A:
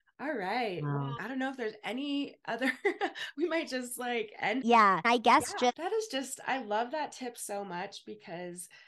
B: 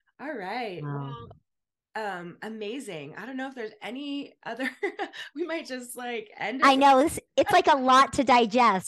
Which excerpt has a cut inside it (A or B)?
A